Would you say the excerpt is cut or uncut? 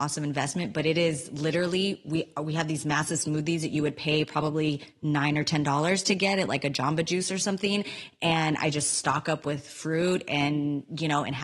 uncut